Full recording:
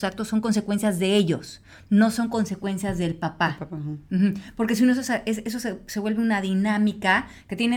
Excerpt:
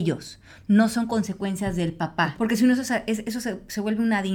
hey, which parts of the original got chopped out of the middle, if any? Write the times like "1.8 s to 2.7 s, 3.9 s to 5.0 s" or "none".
3.6 s to 4.5 s